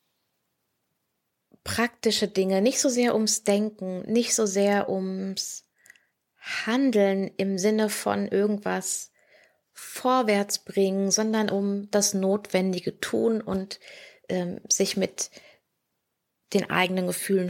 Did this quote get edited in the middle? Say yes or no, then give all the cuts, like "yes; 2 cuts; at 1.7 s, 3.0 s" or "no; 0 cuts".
no; 0 cuts